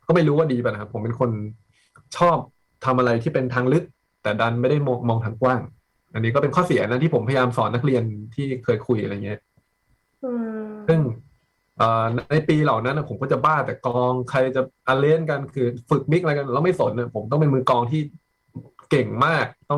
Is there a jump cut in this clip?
no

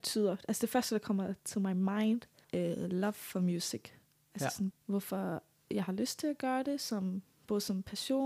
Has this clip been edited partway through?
yes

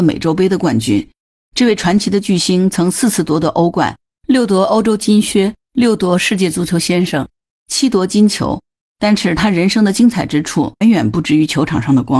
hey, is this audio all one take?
no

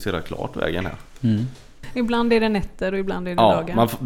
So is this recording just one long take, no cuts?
no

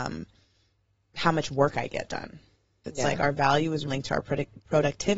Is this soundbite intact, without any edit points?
no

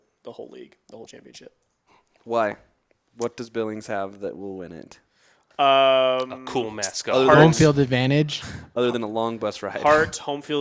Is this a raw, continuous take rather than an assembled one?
yes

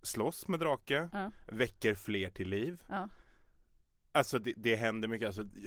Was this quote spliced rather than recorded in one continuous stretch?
no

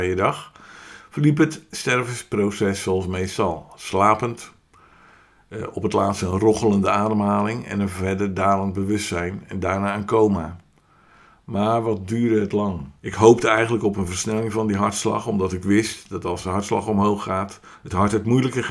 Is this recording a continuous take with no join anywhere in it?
no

